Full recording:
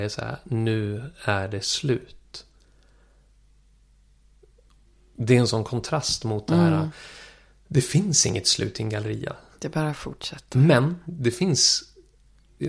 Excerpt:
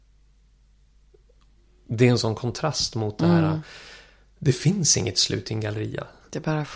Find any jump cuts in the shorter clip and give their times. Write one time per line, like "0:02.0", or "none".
none